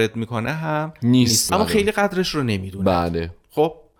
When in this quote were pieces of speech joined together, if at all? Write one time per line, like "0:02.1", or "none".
0:01.5

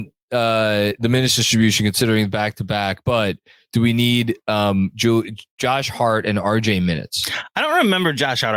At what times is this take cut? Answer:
none

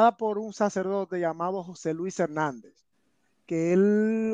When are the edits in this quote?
none

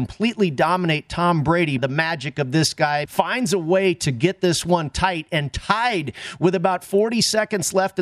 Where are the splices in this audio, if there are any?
0:01.8
0:03.1

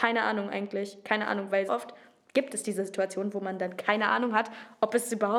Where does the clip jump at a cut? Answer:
0:01.7

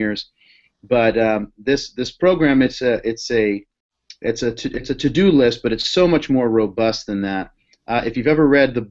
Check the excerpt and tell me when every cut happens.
none

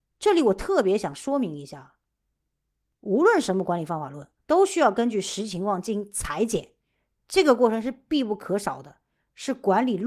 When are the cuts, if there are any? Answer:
0:04.4

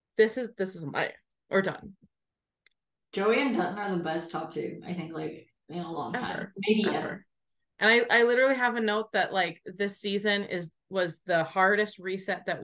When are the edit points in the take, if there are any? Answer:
none

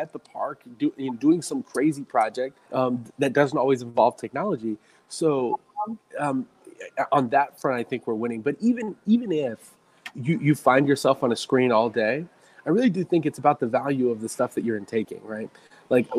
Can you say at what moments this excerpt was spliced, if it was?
0:02.6
0:10.1

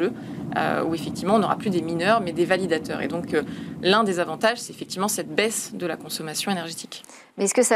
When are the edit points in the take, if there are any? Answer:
none

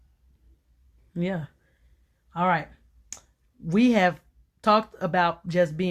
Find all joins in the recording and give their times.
0:01.0

